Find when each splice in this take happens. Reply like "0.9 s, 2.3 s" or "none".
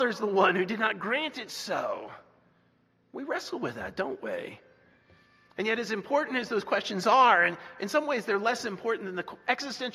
none